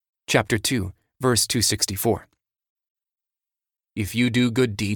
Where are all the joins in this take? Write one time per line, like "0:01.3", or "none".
0:03.8